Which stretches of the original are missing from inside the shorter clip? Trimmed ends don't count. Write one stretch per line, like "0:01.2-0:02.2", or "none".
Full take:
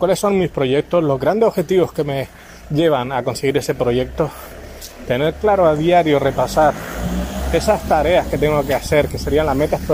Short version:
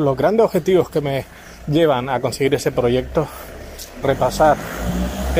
0:05.1-0:06.2